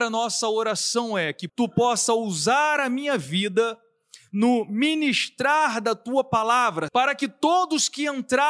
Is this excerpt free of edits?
no; 2 cuts; at 1.5 s, 6.9 s

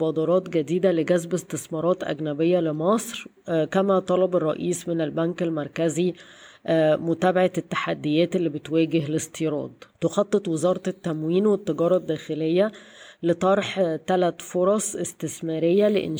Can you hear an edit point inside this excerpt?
yes; 1 cut; at 9.9 s

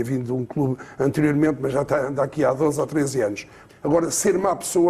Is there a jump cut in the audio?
yes; 1 cut; at 3.7 s

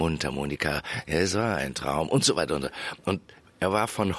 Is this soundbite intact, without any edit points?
yes; 0 cuts

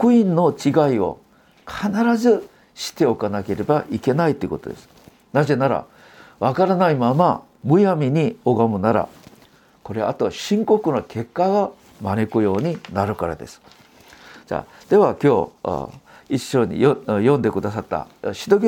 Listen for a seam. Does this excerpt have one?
no; 0 cuts

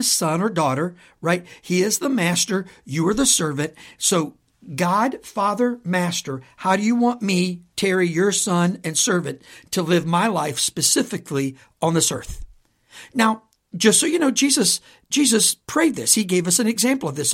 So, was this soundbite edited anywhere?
no; 0 cuts

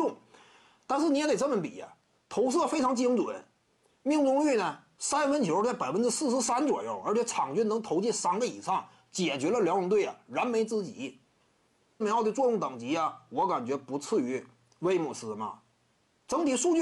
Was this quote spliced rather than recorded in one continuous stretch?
yes; 2 cuts; at 2.2 s, 12.0 s

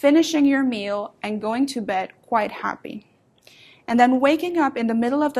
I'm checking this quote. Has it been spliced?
no; 0 cuts

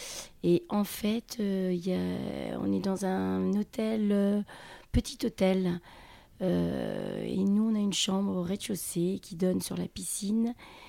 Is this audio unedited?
yes; 0 cuts

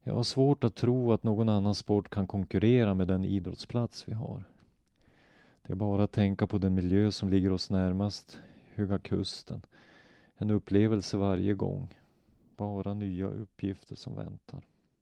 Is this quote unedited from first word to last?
no; 1 cut; at 12.5 s

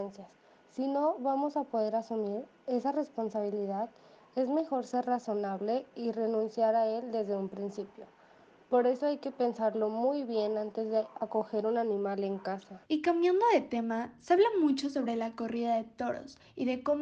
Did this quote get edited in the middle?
yes; 1 cut; at 12.8 s

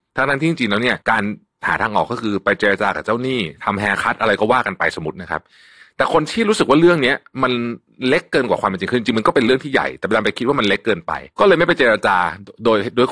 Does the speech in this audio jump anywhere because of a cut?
yes; 2 cuts; at 1.0 s, 11.3 s

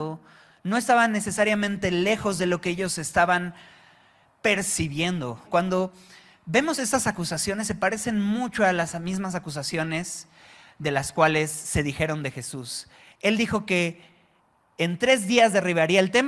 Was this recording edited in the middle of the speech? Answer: yes; 1 cut; at 5.5 s

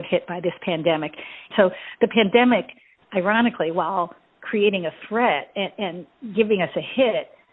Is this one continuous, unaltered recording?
no; 1 cut; at 1.5 s

